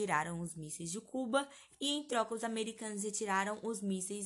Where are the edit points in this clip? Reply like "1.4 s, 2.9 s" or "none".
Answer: none

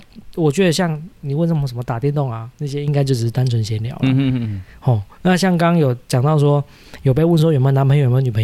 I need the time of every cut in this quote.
none

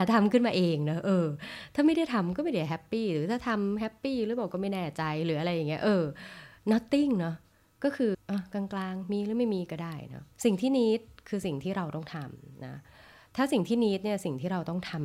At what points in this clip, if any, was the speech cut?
8.1 s, 10.3 s

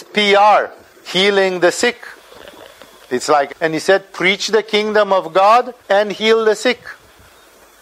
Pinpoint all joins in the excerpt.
3.5 s, 5.8 s

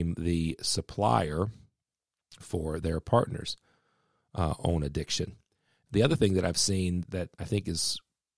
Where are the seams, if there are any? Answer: 5.9 s, 7.0 s

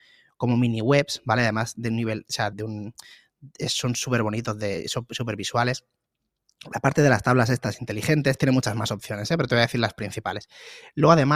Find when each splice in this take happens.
2.5 s

